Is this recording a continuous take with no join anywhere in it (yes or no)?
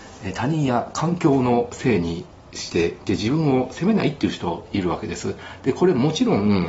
yes